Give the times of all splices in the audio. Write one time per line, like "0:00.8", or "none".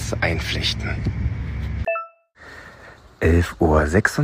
none